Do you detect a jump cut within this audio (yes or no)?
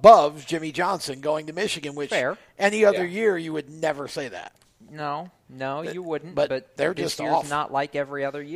no